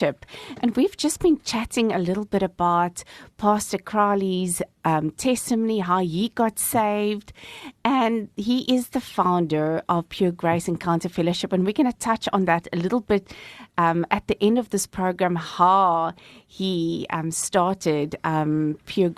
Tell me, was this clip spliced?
no; 0 cuts

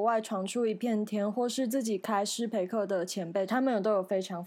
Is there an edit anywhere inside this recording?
yes; 1 cut; at 3.5 s

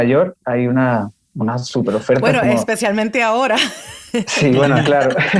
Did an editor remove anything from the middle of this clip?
no; 0 cuts

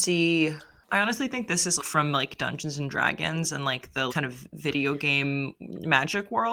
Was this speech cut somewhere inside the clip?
yes; 2 cuts; at 1.8 s, 4.1 s

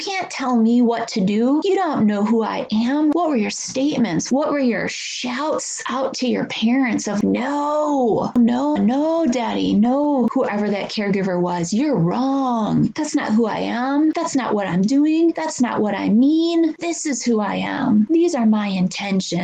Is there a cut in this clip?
yes; 2 cuts; at 8.8 s, 18.1 s

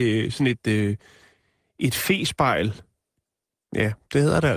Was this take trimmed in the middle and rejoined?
no; 0 cuts

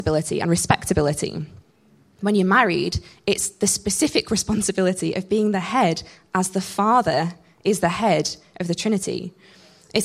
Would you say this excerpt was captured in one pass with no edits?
yes; 0 cuts

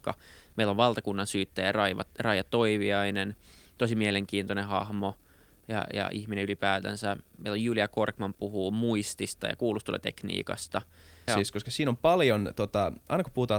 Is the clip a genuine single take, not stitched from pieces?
no; 1 cut; at 11.3 s

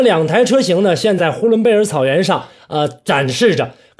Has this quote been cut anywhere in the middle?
yes; 1 cut; at 1.2 s

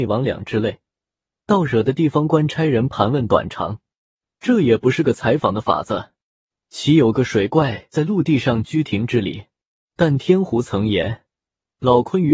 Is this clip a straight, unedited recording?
no; 1 cut; at 4.4 s

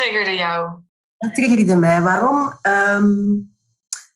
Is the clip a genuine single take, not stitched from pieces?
yes; 0 cuts

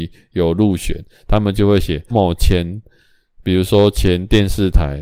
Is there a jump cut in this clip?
yes; 1 cut; at 2.1 s

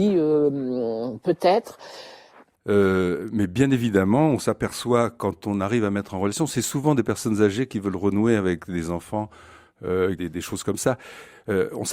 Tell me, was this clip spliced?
yes; 2 cuts; at 2.6 s, 10.2 s

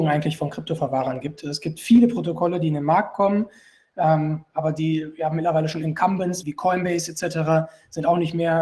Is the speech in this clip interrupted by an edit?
yes; 1 cut; at 6.4 s

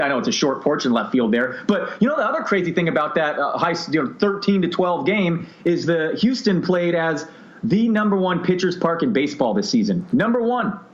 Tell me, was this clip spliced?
no; 0 cuts

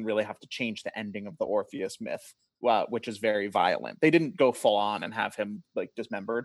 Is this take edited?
no; 0 cuts

